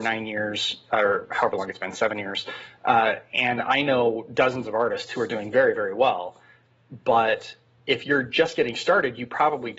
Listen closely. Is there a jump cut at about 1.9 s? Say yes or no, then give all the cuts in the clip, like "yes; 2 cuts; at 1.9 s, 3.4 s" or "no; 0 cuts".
no; 0 cuts